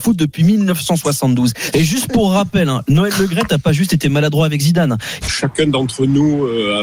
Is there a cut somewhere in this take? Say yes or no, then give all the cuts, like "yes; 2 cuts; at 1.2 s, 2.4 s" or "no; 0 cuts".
yes; 2 cuts; at 1.7 s, 5.2 s